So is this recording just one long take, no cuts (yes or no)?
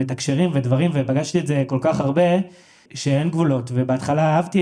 no